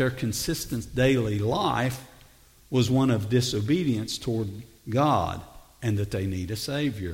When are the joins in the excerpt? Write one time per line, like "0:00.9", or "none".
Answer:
none